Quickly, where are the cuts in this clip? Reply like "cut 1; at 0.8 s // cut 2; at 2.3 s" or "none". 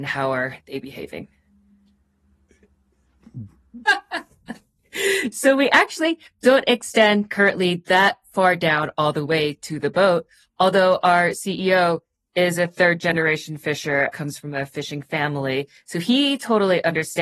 cut 1; at 3.8 s